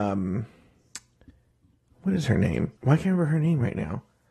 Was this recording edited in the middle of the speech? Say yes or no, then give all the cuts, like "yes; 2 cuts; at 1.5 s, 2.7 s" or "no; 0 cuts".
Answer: yes; 1 cut; at 2.8 s